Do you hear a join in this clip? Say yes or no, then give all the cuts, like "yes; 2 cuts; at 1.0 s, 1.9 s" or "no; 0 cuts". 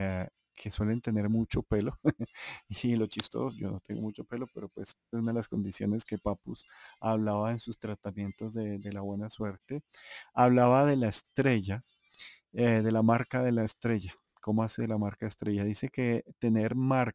no; 0 cuts